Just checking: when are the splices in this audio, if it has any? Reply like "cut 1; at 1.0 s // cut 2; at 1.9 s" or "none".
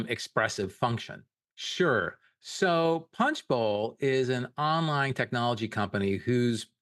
cut 1; at 1.5 s